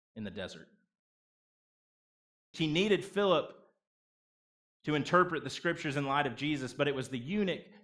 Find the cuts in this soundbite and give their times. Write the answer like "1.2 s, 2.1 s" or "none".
2.5 s